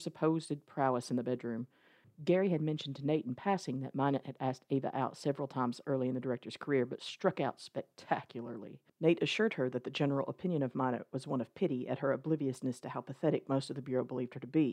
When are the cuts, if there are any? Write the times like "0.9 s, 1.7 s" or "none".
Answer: 2.0 s, 8.9 s